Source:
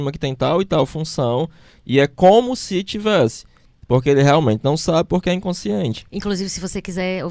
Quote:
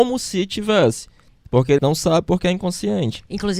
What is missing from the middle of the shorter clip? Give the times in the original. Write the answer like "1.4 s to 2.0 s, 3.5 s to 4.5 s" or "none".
4.2 s to 4.6 s